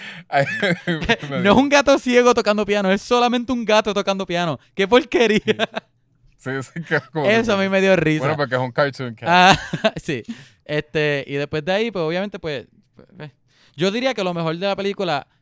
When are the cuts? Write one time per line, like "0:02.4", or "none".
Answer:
none